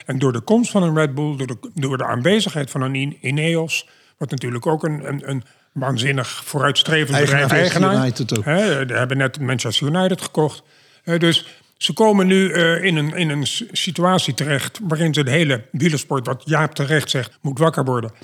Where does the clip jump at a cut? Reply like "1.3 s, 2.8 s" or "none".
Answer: 7.5 s, 17.3 s